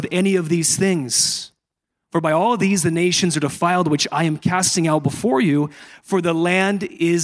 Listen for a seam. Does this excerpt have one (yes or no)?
no